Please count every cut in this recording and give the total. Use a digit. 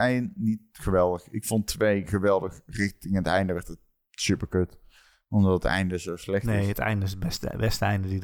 0